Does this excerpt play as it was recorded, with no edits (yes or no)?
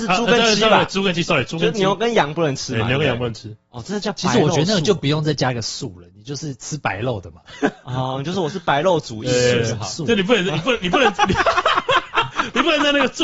yes